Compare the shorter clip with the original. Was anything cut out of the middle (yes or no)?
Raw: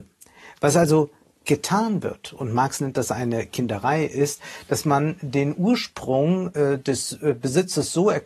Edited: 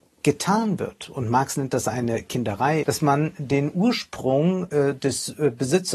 yes